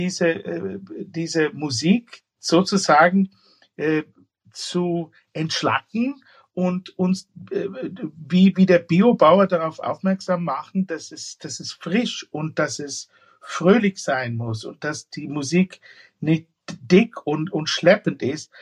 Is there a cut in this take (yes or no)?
no